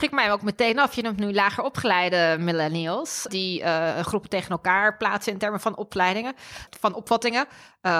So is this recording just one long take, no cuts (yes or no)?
no